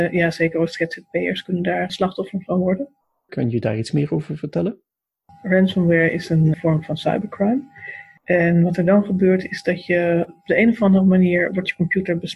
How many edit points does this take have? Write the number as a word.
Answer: one